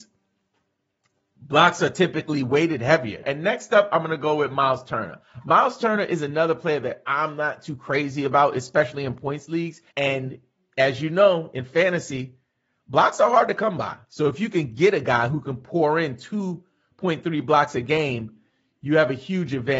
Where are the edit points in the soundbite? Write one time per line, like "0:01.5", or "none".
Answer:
0:03.2
0:09.9